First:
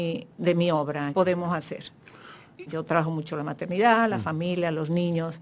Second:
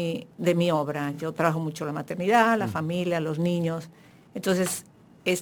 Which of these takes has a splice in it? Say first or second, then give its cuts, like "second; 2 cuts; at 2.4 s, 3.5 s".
first; 2 cuts; at 1.1 s, 2.7 s